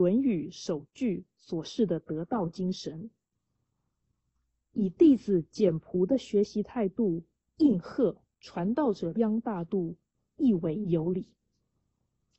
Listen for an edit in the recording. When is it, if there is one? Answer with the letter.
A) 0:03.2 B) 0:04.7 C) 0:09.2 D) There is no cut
C